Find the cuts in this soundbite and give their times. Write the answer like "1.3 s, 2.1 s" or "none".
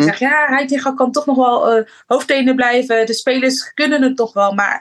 none